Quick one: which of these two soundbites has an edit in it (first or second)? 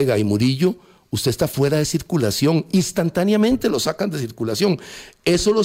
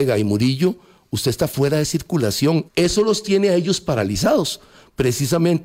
second